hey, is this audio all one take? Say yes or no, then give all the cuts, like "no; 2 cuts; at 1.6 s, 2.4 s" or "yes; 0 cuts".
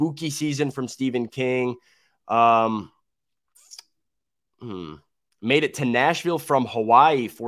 yes; 0 cuts